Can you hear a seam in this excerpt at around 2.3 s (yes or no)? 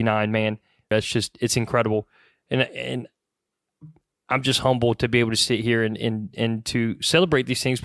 no